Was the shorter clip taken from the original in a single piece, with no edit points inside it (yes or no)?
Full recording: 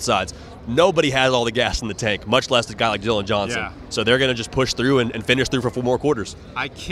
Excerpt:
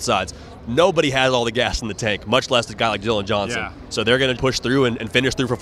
no